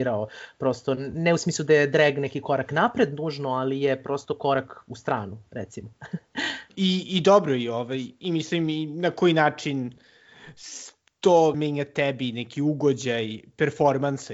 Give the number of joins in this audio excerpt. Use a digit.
2